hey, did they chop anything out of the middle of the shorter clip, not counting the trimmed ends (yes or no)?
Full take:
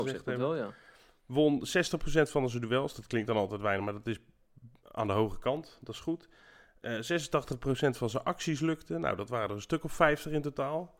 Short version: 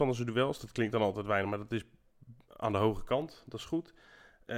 no